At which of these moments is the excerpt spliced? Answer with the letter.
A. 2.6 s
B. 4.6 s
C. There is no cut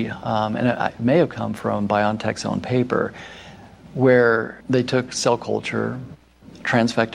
B